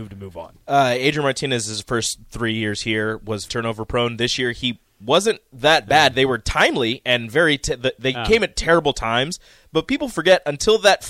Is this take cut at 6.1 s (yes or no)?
no